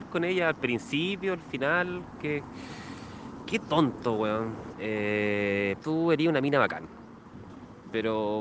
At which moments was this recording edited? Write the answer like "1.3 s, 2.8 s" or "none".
4.7 s, 5.8 s